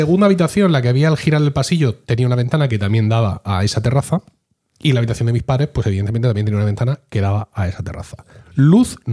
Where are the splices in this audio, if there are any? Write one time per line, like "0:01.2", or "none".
none